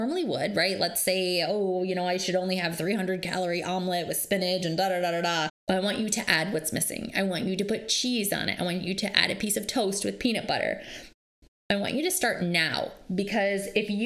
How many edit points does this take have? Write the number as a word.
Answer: one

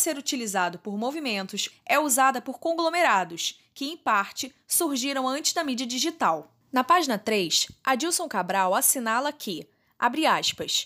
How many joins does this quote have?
two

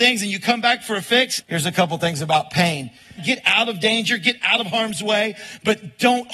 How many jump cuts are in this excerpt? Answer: two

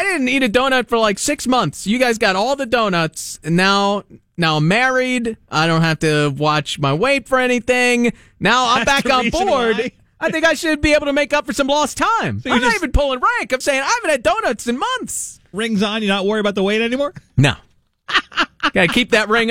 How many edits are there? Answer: one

